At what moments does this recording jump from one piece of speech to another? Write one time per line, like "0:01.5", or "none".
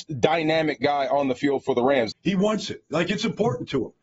0:02.1